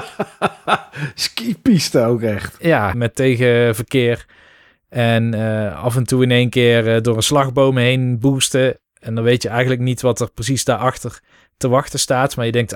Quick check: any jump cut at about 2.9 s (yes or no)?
yes